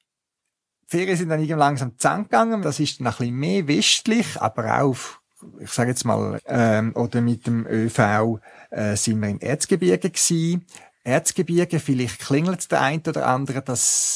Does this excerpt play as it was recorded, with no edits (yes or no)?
no